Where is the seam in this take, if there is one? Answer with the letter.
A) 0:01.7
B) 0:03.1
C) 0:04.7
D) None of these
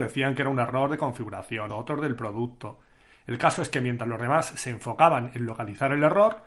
A